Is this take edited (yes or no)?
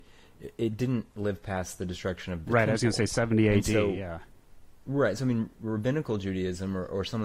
no